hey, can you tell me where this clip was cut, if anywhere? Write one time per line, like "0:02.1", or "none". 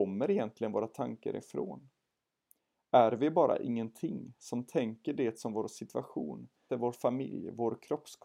0:06.7